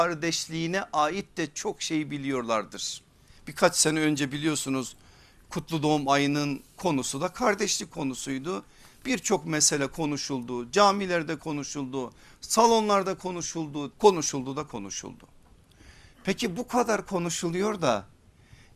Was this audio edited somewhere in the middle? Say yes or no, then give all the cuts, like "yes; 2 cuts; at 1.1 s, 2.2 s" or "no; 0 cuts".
yes; 1 cut; at 13.9 s